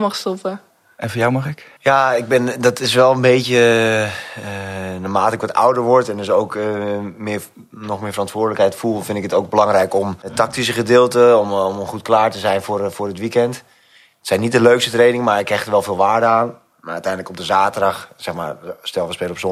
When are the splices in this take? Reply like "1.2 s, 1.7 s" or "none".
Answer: 1.8 s